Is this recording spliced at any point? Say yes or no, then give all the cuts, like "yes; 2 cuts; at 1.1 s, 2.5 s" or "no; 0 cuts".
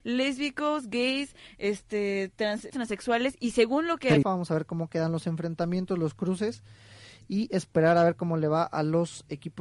yes; 2 cuts; at 2.7 s, 4.2 s